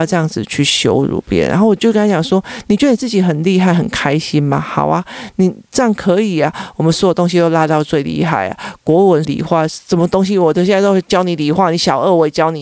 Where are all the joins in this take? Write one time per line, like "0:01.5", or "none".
0:09.2